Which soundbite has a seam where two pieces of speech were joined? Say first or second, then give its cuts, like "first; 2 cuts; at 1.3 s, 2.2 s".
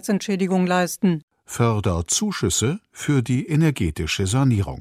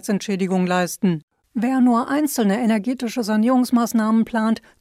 second; 1 cut; at 1.4 s